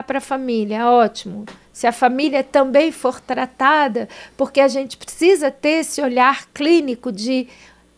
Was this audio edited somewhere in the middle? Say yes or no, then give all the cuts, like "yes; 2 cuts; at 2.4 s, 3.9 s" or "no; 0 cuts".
no; 0 cuts